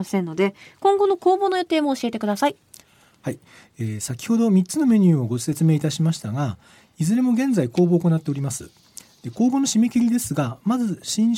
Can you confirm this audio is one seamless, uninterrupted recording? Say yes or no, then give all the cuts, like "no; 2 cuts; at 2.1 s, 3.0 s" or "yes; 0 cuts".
yes; 0 cuts